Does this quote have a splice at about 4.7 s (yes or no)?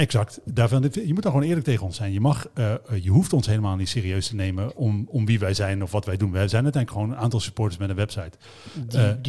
yes